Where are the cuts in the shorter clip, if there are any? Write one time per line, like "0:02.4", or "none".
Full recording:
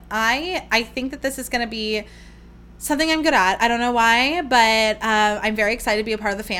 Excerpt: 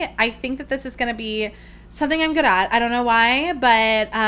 0:01.8